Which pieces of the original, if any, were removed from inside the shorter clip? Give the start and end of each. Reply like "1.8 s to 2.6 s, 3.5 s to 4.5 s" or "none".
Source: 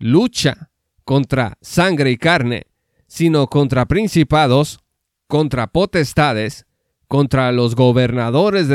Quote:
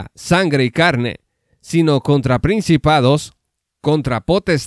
none